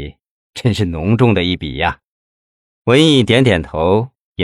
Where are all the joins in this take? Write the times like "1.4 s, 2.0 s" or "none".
none